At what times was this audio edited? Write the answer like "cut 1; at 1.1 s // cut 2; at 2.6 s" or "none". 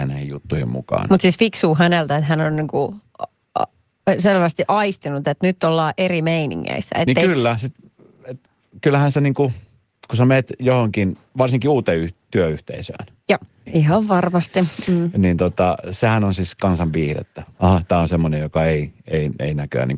cut 1; at 7.6 s // cut 2; at 13.7 s // cut 3; at 17.5 s